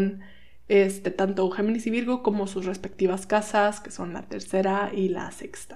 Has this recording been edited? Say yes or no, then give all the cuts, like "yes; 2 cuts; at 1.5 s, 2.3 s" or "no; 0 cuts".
no; 0 cuts